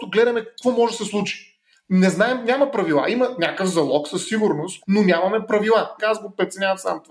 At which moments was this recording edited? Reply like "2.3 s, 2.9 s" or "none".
4.8 s, 6.0 s